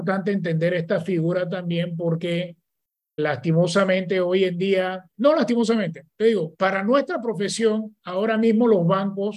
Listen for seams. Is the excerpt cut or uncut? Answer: cut